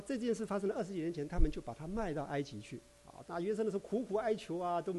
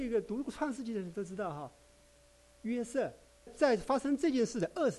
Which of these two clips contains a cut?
second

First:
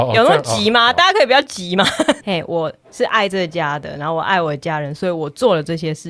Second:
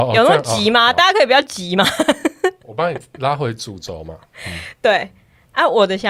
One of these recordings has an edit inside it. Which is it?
first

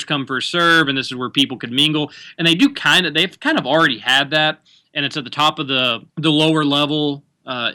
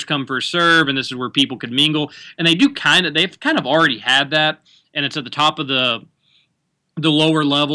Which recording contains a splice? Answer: first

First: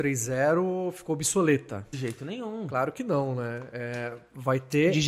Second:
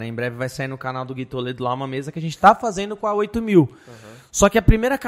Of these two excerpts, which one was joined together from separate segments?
first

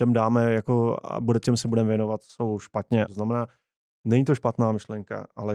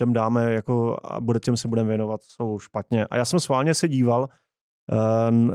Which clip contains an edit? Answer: first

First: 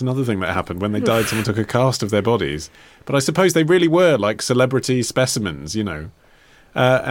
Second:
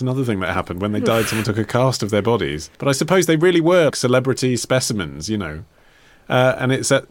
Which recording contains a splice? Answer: second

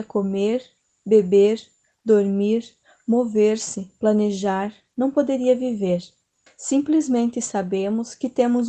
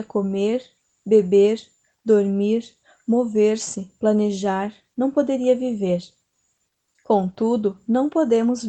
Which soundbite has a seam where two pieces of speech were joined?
first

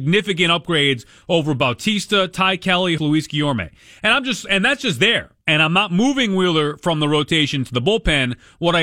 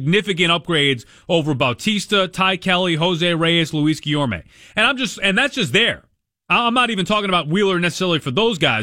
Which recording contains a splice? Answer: first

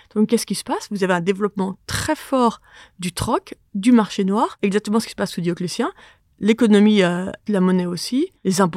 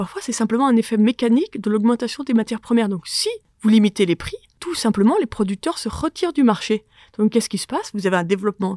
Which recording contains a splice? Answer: first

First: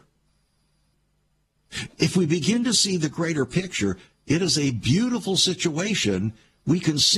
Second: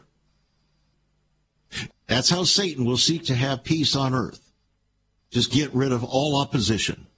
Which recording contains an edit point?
second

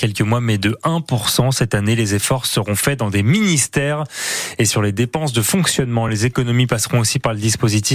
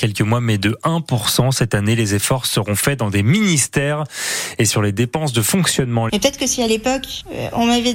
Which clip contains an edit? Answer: second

